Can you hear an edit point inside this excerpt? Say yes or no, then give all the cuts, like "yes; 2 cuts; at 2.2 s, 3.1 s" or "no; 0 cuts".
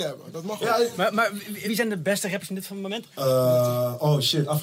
yes; 2 cuts; at 1.6 s, 3.1 s